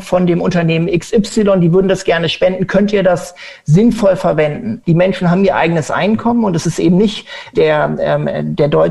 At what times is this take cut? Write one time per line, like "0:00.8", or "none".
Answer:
0:04.8
0:07.5